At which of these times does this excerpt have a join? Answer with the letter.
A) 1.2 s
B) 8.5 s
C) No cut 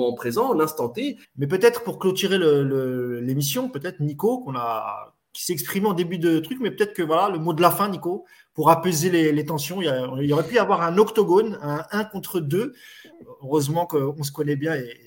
A